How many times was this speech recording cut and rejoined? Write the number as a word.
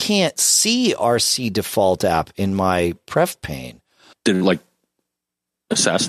one